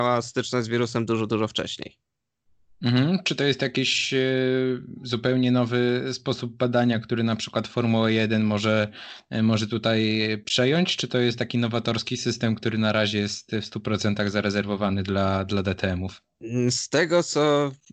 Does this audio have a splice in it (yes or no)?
no